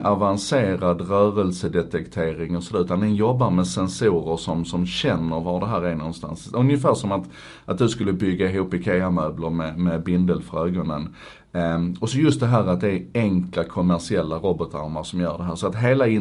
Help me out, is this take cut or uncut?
uncut